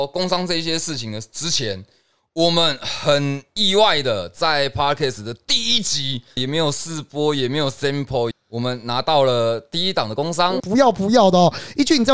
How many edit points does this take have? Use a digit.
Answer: 3